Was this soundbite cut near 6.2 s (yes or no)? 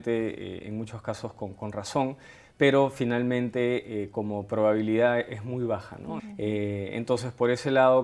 yes